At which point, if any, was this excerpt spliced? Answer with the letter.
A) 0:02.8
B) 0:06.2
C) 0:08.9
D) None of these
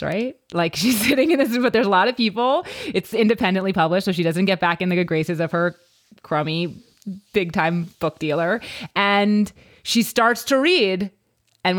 D